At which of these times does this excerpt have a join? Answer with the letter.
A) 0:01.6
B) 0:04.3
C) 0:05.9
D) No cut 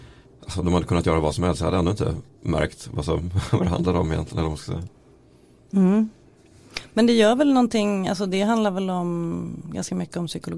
D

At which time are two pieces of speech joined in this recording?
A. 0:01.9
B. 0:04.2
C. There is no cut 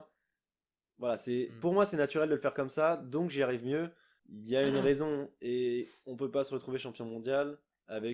B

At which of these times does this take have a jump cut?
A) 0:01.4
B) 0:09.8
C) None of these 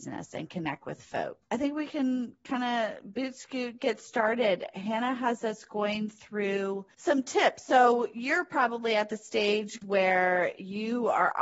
B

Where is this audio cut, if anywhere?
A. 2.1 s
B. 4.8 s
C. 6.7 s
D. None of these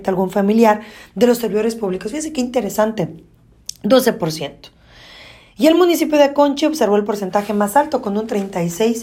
D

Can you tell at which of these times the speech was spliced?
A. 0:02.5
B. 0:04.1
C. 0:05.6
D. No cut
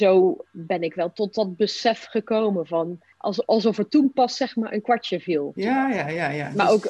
C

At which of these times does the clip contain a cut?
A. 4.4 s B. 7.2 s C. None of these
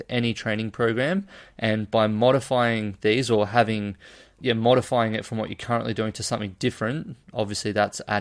A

